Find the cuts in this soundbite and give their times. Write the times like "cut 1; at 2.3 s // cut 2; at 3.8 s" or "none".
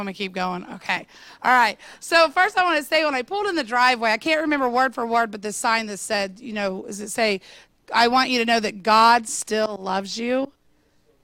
none